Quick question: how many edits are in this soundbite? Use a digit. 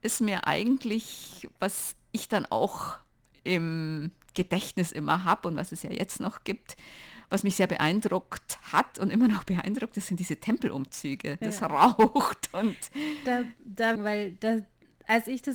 2